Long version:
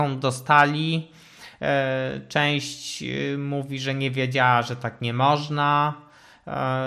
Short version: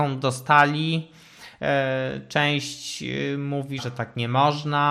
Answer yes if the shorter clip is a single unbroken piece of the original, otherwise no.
no